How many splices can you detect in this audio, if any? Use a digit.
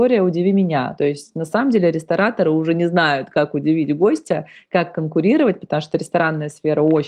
0